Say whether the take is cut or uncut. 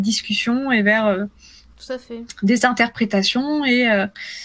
uncut